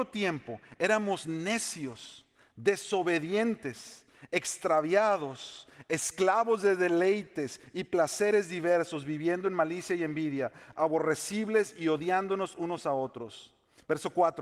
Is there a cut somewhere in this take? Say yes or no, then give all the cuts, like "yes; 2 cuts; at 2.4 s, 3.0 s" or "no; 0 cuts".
no; 0 cuts